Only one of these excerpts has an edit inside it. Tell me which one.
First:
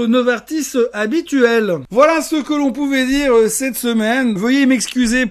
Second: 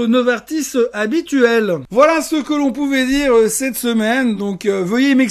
first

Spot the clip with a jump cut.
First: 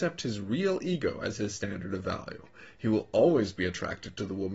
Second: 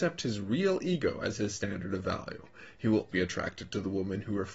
second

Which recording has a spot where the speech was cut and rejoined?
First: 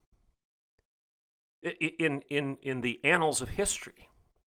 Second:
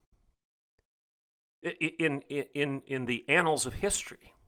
first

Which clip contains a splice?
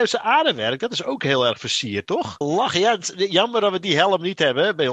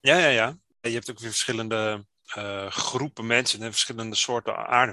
first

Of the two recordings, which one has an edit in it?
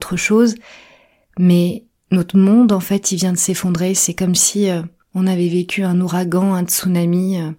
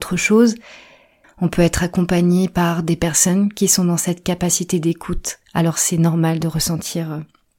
second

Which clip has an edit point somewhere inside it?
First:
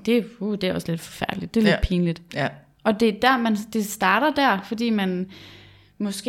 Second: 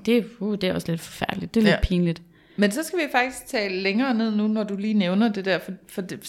first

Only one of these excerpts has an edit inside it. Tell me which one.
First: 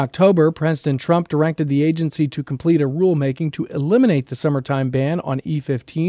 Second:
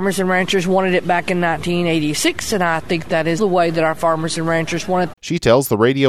second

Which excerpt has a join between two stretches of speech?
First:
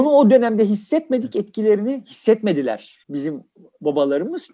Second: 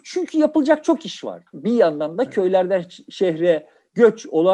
second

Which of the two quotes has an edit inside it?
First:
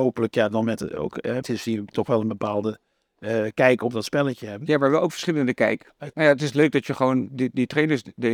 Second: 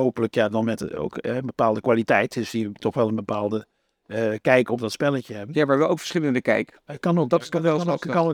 first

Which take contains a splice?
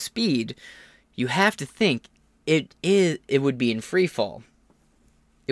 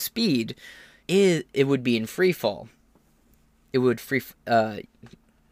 second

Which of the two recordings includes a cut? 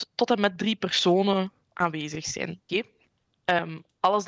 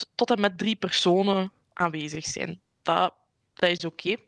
first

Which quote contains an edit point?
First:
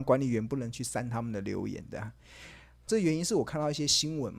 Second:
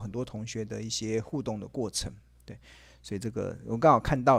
first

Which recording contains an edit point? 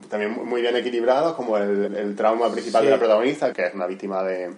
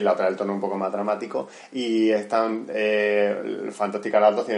first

